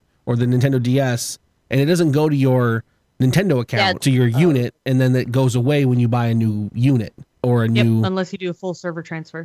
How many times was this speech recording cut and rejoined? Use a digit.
2